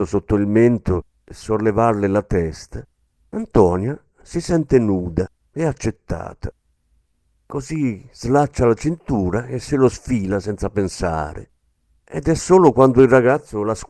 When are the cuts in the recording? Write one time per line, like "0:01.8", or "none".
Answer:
0:07.3